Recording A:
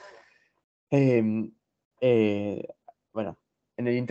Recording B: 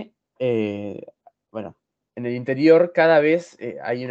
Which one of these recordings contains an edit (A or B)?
A